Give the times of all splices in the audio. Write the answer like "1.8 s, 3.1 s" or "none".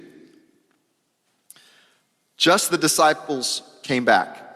2.7 s